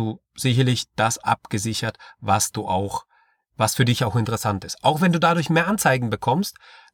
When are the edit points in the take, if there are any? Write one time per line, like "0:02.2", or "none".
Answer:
none